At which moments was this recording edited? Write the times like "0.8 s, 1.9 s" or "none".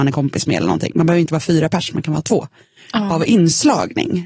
3.1 s